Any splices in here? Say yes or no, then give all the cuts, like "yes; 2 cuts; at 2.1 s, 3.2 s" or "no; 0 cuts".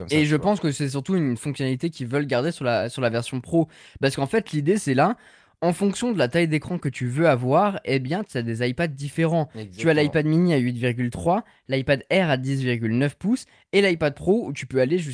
no; 0 cuts